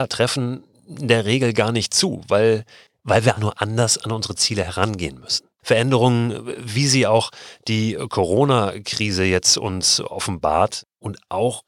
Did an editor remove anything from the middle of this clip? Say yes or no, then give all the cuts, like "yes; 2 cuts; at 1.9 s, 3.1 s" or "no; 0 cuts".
yes; 2 cuts; at 3.4 s, 5.6 s